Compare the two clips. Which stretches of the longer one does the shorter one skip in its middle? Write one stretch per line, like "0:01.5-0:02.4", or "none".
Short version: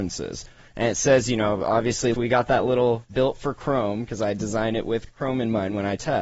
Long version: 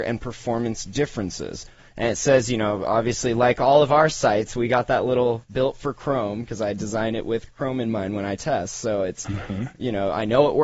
0:03.3-0:04.5